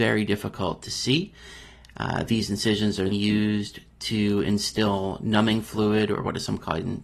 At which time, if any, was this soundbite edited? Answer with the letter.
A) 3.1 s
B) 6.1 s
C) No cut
A